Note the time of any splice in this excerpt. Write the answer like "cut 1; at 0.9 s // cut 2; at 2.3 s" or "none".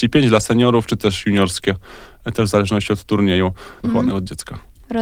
cut 1; at 3.8 s